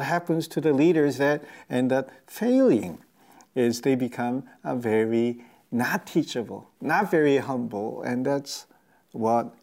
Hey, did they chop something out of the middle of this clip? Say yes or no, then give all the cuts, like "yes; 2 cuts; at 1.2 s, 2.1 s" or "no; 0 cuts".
no; 0 cuts